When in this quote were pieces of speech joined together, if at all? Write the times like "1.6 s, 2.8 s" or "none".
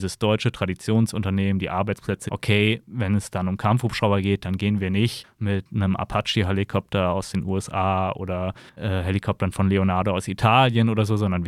2.3 s